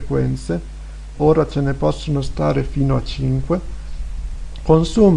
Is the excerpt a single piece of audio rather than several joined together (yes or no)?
no